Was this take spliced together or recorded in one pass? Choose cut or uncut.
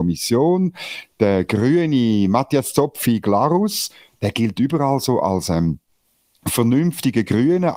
uncut